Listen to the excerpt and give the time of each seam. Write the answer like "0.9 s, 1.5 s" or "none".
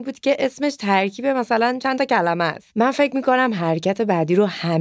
2.7 s